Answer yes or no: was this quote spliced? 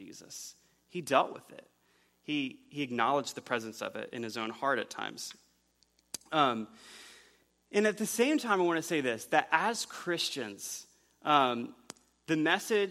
no